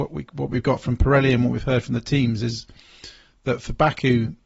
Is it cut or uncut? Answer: uncut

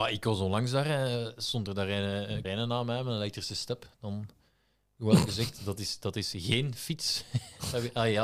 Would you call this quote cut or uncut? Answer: cut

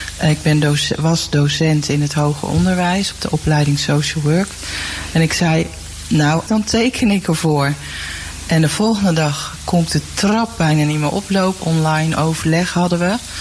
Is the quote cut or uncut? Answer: cut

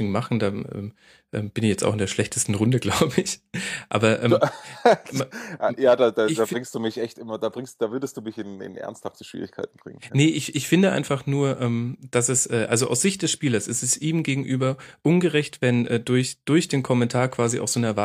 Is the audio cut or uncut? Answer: uncut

